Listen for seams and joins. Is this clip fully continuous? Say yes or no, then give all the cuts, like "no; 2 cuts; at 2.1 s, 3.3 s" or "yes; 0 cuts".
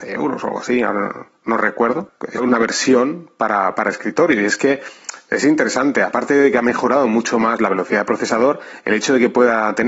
no; 1 cut; at 2.4 s